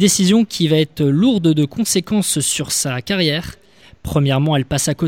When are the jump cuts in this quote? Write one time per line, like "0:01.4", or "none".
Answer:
none